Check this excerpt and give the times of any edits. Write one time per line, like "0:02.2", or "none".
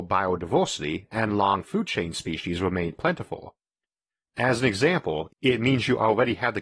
0:04.2
0:05.3